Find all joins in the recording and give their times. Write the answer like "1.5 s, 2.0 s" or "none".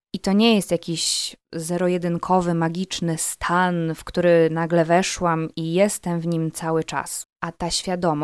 7.2 s